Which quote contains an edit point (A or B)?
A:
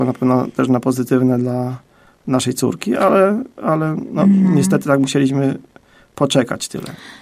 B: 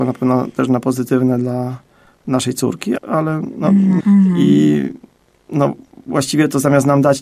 B